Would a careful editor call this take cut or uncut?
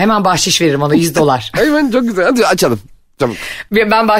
uncut